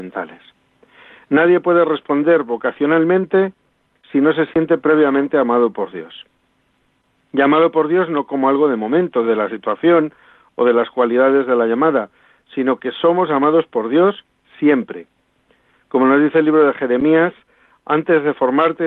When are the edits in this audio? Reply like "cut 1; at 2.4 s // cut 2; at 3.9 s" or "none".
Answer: none